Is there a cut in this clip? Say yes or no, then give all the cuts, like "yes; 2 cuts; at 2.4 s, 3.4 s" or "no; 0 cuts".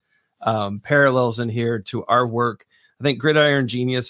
no; 0 cuts